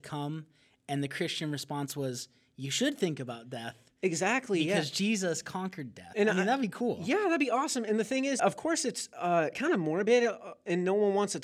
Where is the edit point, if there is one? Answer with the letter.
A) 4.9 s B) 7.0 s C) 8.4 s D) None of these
C